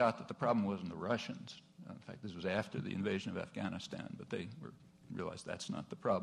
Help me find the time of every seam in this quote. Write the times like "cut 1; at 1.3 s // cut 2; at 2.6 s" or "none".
none

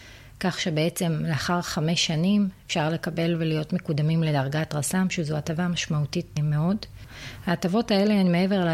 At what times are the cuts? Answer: cut 1; at 6.4 s

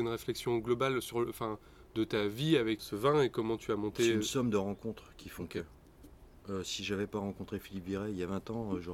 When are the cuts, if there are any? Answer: cut 1; at 2.8 s

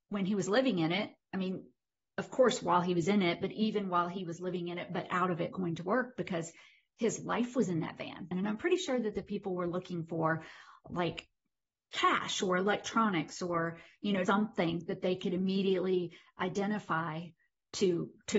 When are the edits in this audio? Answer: cut 1; at 8.3 s // cut 2; at 14.2 s

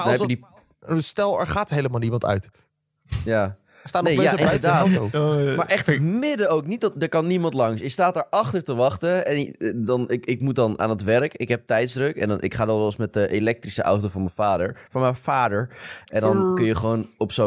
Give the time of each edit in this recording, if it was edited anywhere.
none

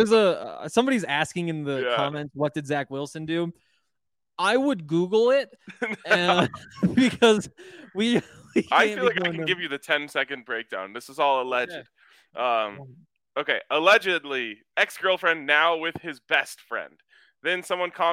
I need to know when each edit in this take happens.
cut 1; at 14.7 s

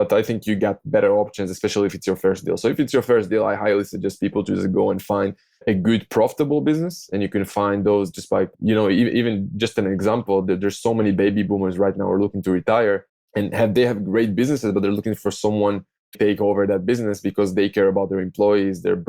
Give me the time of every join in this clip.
cut 1; at 8.5 s // cut 2; at 16.1 s

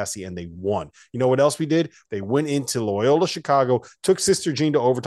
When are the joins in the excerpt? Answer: cut 1; at 2.0 s

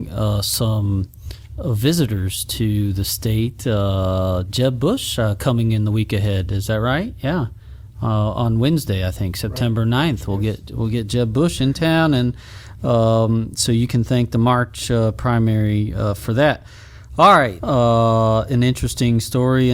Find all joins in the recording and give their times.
cut 1; at 17.6 s

